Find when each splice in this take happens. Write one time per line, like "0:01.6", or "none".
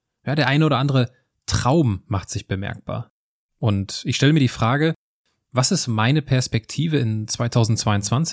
0:03.5